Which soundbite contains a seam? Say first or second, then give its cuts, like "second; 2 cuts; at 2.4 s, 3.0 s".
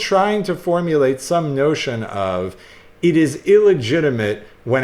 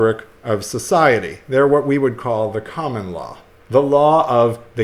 second; 1 cut; at 3.6 s